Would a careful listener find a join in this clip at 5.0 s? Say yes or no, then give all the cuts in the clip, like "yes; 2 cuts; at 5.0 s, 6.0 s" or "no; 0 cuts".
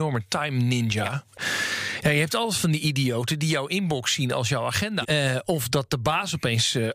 yes; 1 cut; at 5.0 s